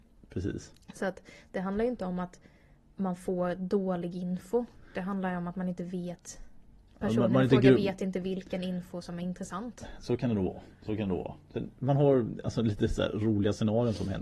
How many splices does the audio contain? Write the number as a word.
zero